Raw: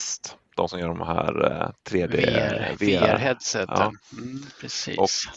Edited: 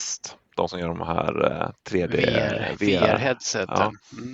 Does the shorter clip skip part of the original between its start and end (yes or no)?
no